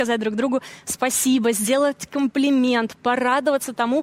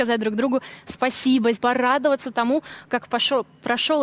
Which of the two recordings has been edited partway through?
second; 1 cut; at 1.5 s

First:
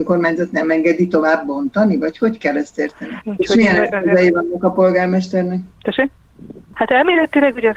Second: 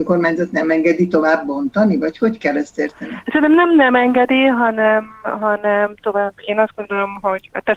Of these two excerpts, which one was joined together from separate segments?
first; 3 cuts; at 3.2 s, 5.7 s, 6.7 s

